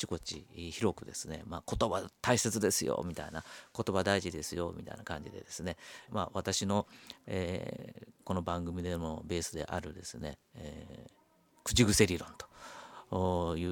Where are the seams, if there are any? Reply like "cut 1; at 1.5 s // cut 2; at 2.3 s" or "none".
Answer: cut 1; at 6.1 s